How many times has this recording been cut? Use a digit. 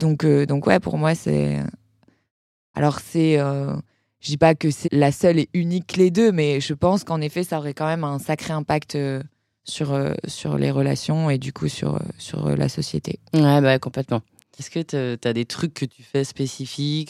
2